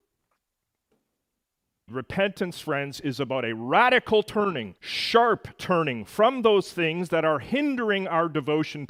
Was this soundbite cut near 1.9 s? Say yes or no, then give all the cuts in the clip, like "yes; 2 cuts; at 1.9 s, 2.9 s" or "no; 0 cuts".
yes; 2 cuts; at 1.9 s, 4.8 s